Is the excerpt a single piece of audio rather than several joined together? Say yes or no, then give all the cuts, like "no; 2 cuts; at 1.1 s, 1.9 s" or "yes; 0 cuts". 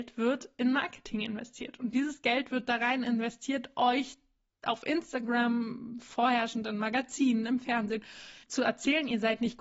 no; 1 cut; at 8.4 s